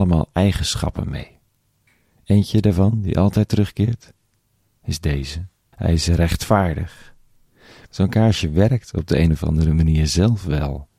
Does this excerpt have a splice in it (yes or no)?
yes